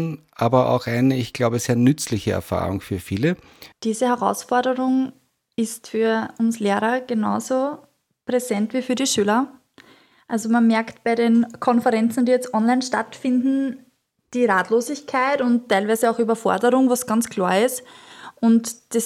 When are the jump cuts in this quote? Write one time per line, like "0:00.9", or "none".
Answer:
0:03.7